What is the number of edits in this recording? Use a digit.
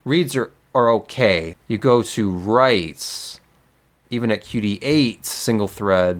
2